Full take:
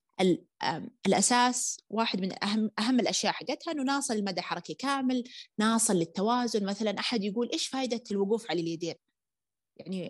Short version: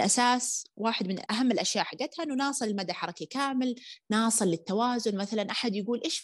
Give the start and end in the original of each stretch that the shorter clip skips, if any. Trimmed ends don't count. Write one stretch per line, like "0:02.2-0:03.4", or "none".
0:02.4-0:02.7